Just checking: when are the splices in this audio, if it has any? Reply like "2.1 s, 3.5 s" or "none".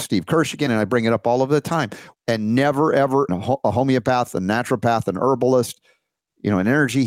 2.1 s, 3.3 s

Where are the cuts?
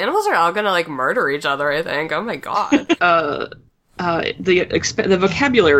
3.0 s

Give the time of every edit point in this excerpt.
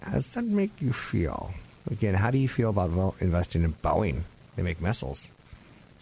none

